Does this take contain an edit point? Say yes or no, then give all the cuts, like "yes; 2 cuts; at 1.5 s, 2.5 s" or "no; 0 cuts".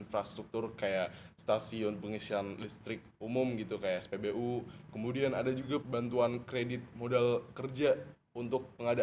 yes; 1 cut; at 5.8 s